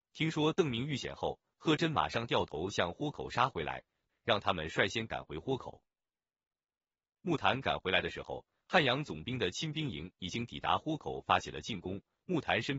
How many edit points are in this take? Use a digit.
1